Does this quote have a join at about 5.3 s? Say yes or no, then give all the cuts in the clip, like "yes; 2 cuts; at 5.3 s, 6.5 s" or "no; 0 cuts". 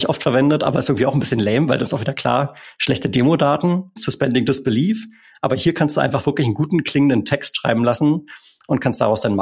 no; 0 cuts